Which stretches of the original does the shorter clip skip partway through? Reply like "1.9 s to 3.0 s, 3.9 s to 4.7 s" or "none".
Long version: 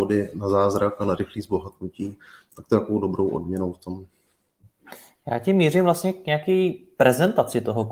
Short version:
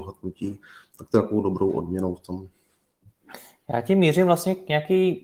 none